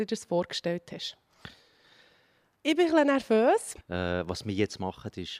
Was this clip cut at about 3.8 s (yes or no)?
yes